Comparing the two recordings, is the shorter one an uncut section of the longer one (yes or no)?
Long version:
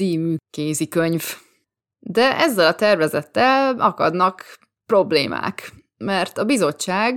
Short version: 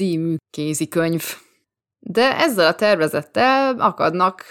yes